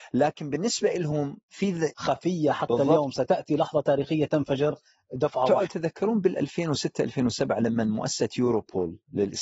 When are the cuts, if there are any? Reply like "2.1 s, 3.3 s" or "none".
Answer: 1.9 s, 5.7 s